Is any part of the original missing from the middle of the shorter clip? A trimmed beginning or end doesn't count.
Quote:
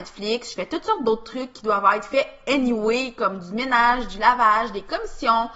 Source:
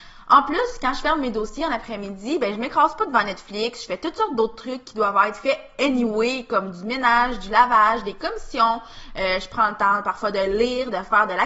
no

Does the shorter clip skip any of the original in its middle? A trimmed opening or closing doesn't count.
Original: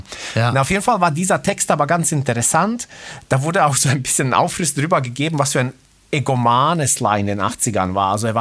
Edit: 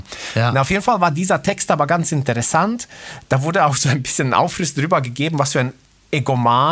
no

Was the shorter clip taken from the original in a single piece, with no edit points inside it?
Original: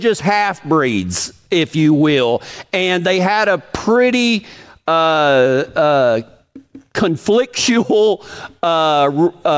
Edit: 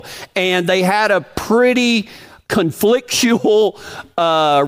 no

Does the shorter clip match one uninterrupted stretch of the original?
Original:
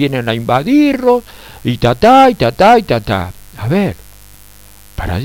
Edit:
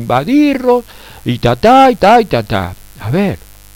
no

